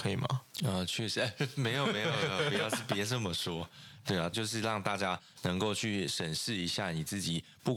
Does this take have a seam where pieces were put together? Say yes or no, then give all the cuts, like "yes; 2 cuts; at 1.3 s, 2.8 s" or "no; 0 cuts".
yes; 1 cut; at 4.3 s